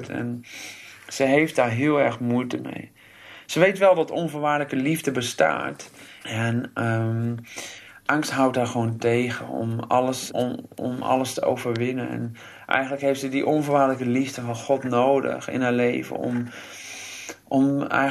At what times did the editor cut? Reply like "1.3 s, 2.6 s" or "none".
6.2 s, 10.3 s